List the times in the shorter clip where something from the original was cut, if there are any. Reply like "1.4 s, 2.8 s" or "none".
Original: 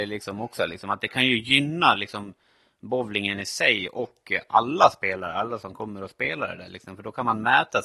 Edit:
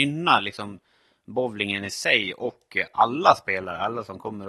none